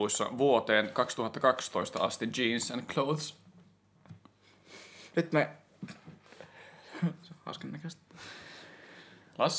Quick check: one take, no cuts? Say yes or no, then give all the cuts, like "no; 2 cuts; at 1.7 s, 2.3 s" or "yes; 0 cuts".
no; 1 cut; at 7.2 s